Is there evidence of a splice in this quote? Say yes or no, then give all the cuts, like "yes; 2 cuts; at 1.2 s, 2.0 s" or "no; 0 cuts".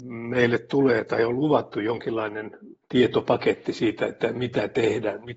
no; 0 cuts